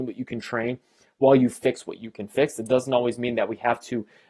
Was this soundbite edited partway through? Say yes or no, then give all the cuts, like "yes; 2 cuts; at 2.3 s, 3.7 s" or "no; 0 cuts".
no; 0 cuts